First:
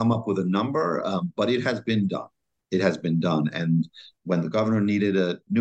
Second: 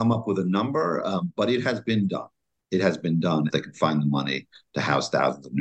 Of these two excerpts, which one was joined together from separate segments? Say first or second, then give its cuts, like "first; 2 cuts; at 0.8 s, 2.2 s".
second; 1 cut; at 3.5 s